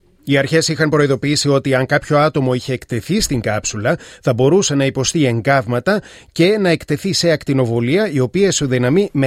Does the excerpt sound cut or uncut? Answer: uncut